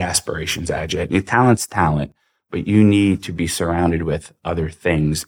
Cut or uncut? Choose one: cut